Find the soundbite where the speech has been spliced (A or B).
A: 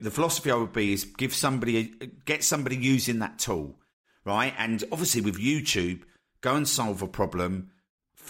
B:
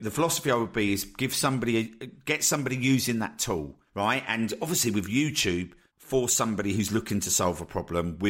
B